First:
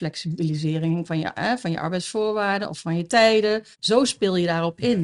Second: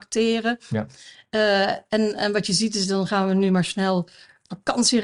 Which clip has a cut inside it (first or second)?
first